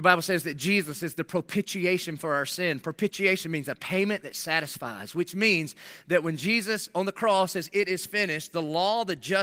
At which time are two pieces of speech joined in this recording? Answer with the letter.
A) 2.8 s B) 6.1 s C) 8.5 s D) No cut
D